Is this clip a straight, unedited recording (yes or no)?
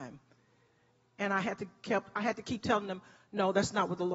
yes